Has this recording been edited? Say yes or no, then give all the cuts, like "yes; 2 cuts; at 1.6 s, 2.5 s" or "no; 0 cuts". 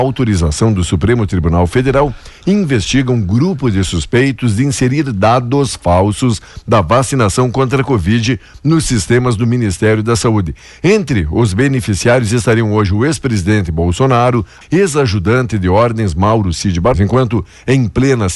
yes; 2 cuts; at 14.6 s, 16.9 s